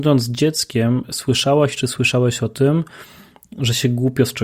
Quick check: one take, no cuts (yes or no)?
yes